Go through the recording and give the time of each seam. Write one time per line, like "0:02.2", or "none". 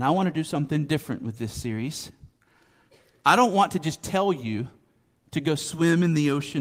none

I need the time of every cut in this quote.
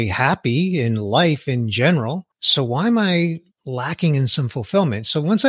0:02.3
0:03.5

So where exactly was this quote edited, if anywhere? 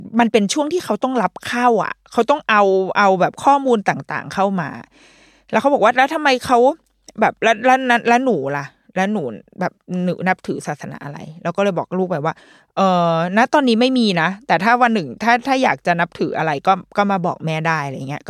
none

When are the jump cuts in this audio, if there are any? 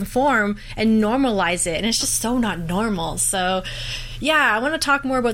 none

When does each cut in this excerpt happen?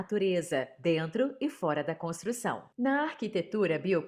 0:02.7

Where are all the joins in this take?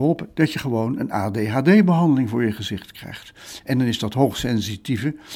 none

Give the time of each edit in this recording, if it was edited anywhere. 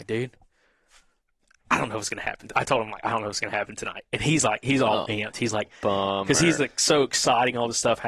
0:06.6

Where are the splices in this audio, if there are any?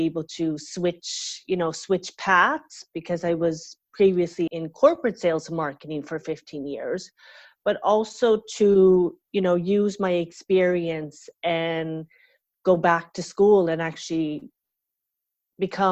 0:04.5

